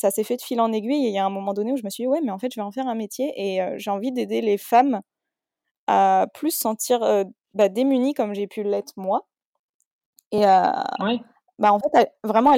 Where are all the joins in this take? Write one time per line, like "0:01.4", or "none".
none